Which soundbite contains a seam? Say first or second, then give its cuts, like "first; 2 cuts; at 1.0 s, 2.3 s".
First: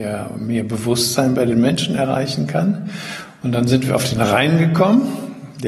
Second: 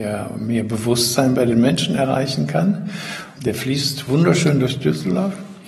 second; 1 cut; at 3.4 s